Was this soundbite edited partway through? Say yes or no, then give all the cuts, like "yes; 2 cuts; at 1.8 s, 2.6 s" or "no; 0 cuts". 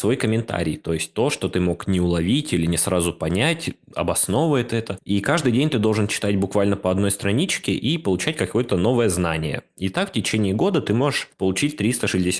no; 0 cuts